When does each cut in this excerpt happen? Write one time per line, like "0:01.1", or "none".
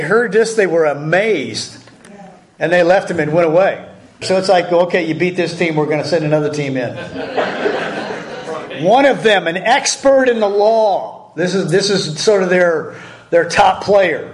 0:04.2